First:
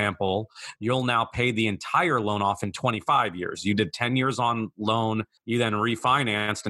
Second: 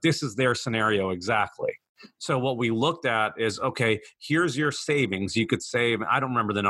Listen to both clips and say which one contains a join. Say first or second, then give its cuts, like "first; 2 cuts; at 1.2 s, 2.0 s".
first; 1 cut; at 5.4 s